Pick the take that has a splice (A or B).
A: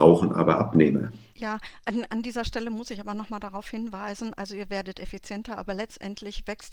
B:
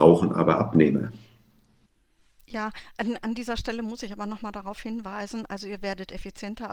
A